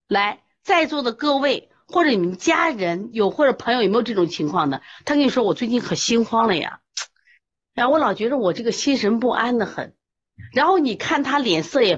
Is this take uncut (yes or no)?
yes